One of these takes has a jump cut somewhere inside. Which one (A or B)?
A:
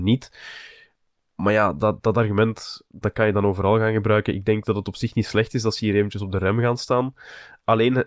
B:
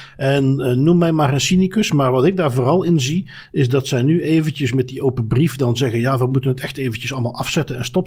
A